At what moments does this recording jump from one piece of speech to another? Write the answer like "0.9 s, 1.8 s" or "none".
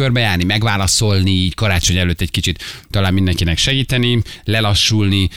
none